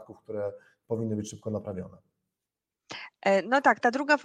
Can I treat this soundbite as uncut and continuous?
yes; 0 cuts

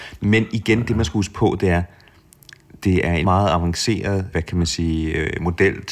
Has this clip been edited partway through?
yes; 2 cuts; at 3.2 s, 4.3 s

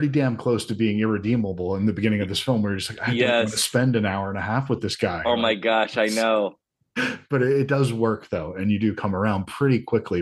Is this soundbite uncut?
yes; 0 cuts

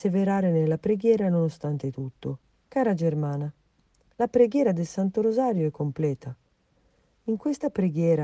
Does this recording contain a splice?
yes; 1 cut; at 2.7 s

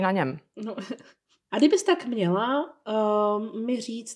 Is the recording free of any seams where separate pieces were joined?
no; 1 cut; at 1.5 s

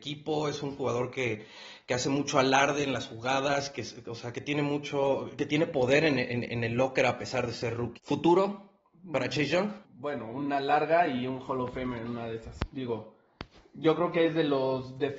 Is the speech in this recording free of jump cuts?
no; 2 cuts; at 8.0 s, 9.8 s

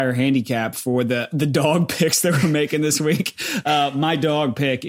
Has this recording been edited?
no; 0 cuts

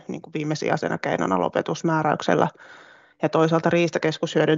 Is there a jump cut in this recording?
no; 0 cuts

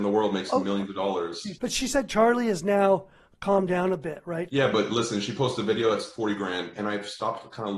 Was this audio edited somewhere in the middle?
yes; 2 cuts; at 4.5 s, 6.8 s

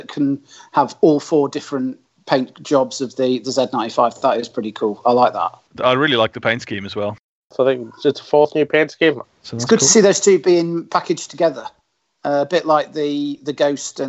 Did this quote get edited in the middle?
yes; 2 cuts; at 5.7 s, 9.2 s

